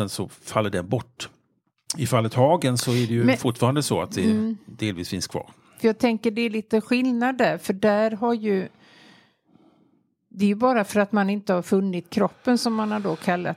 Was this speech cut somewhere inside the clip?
no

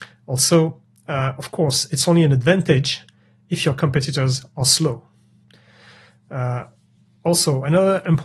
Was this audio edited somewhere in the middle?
no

